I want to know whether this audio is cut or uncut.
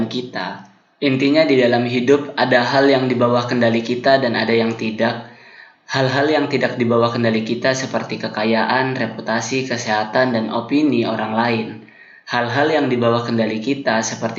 cut